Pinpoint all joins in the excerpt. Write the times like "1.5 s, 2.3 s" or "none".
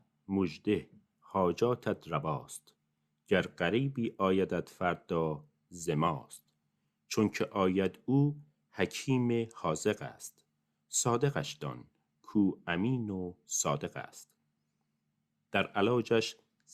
none